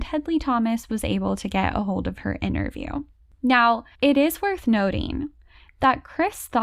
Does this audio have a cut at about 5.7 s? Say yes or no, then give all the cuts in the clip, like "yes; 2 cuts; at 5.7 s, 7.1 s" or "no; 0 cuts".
no; 1 cut; at 3.9 s